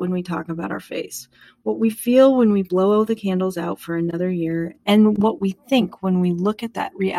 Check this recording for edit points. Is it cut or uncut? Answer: uncut